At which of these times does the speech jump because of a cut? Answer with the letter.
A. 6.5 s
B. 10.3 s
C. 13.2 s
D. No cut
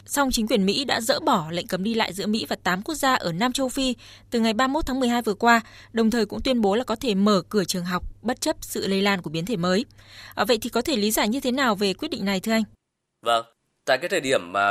D